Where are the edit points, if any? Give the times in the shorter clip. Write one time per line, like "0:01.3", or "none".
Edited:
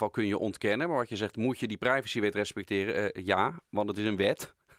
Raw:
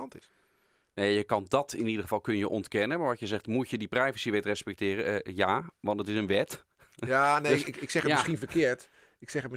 none